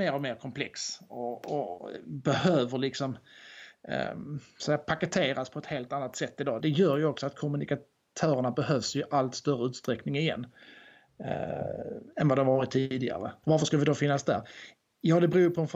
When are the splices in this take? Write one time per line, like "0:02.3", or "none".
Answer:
0:06.6
0:13.4